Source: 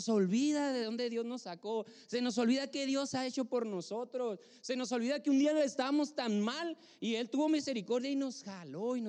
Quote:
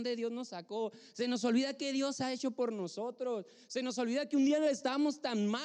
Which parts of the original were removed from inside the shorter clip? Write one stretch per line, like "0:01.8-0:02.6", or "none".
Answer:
none